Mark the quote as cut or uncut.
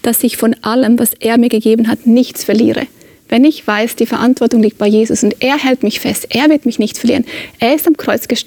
uncut